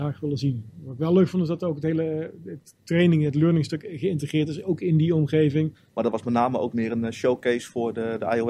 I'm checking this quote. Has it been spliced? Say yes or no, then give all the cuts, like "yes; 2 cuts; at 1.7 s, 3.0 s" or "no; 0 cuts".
yes; 1 cut; at 5.7 s